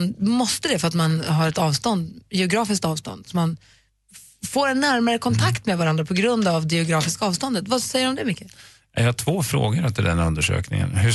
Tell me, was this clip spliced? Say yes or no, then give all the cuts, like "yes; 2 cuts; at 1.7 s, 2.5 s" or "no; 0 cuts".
no; 0 cuts